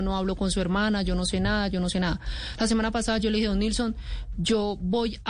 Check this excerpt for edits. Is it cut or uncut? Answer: uncut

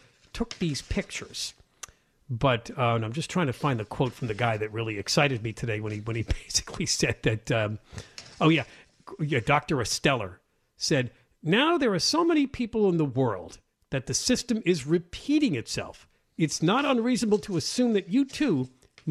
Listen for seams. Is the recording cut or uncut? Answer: uncut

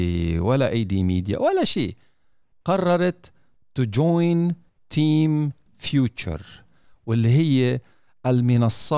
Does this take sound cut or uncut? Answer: uncut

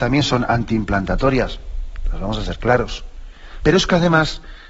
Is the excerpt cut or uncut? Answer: cut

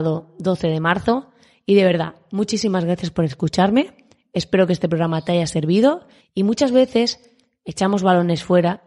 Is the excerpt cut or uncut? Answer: cut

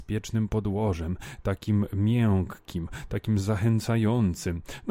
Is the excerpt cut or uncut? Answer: uncut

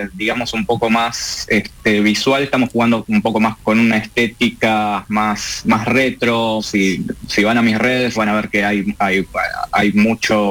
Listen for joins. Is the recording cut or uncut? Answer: cut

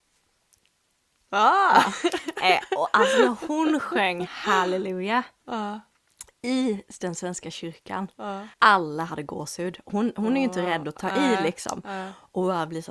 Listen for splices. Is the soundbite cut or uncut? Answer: cut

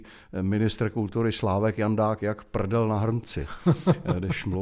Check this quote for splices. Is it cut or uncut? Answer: uncut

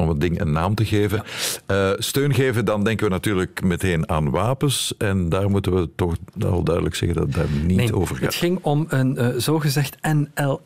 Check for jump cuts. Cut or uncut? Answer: uncut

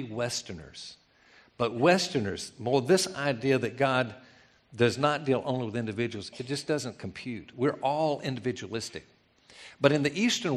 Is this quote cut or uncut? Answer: uncut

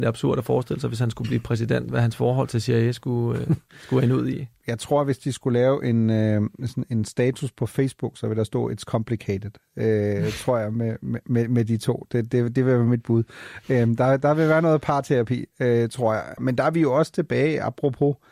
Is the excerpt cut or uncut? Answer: uncut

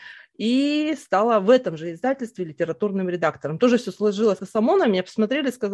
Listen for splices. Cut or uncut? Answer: cut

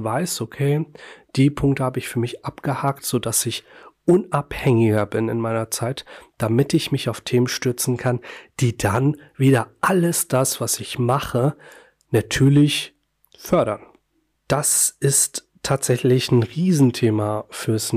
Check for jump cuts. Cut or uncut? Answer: uncut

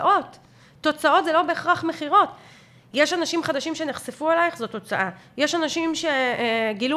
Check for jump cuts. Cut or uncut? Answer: uncut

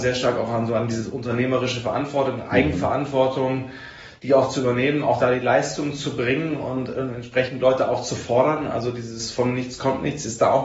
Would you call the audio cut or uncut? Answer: uncut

